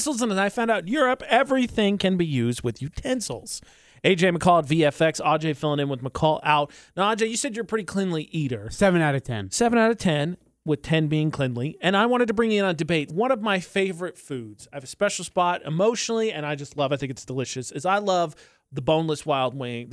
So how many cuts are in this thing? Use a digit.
1